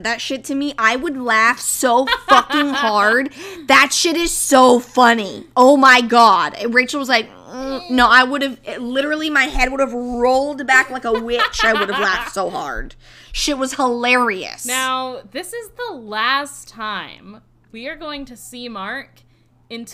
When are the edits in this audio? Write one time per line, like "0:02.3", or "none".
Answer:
none